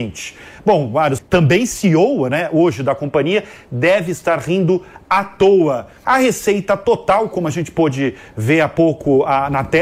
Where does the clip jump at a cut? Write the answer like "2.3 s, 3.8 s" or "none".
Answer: 1.2 s, 6.0 s